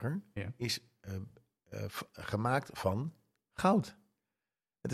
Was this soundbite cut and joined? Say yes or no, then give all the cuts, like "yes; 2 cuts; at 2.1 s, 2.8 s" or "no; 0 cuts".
no; 0 cuts